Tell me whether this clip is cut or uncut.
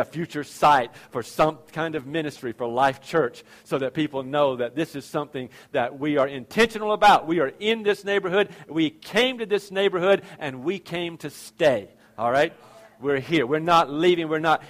uncut